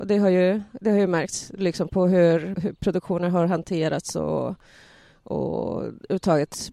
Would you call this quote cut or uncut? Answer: cut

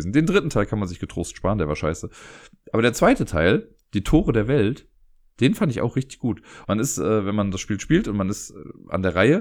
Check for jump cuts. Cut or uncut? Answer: cut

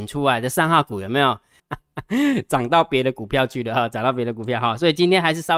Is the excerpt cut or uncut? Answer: cut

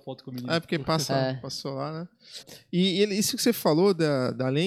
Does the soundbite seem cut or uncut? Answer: cut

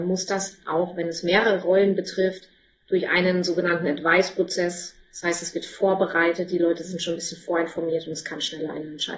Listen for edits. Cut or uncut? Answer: uncut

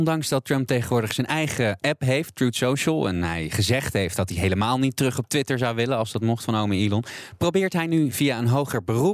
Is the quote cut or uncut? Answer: uncut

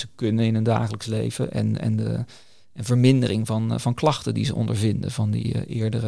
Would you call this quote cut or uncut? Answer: uncut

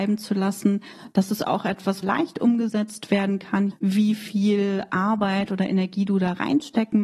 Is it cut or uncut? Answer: cut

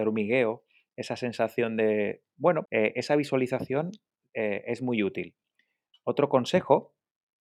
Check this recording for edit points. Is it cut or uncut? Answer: cut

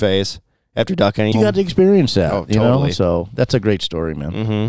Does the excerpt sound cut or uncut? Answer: cut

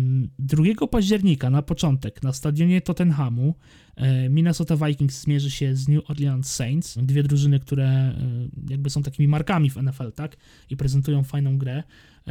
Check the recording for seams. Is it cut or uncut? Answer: cut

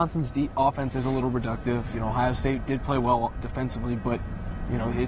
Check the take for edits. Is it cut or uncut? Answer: uncut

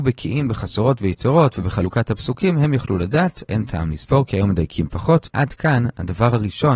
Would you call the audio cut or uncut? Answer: cut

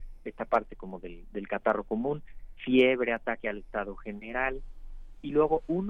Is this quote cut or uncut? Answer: uncut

